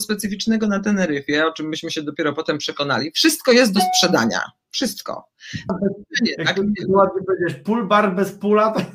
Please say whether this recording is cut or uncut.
cut